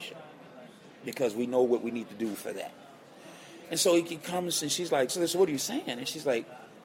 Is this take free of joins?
no; 1 cut; at 5.1 s

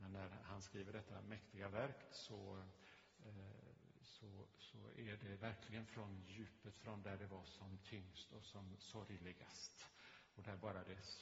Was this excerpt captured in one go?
yes; 0 cuts

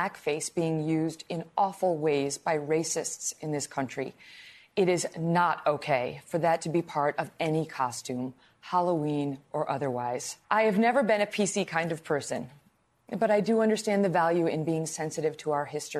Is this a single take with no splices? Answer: no; 1 cut; at 10.4 s

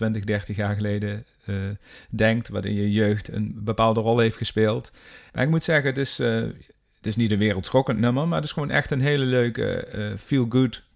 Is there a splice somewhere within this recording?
yes; 1 cut; at 5.3 s

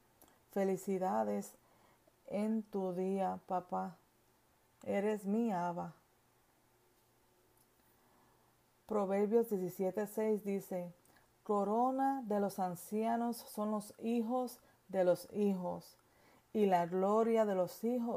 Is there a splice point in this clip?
no; 0 cuts

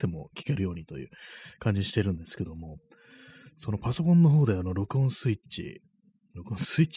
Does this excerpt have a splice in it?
no; 0 cuts

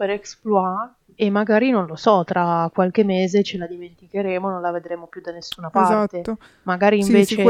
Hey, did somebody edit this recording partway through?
no; 0 cuts

